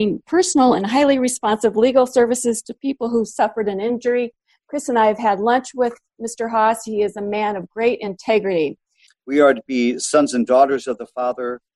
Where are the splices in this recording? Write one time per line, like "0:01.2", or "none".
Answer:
0:09.1